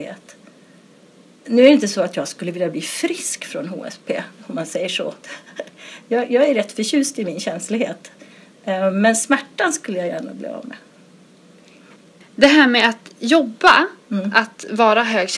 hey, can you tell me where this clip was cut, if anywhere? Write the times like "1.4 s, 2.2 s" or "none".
none